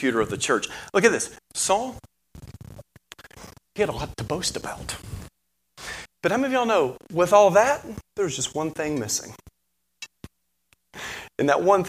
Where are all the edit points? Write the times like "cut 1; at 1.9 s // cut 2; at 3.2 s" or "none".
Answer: cut 1; at 1.4 s // cut 2; at 6.1 s // cut 3; at 8.1 s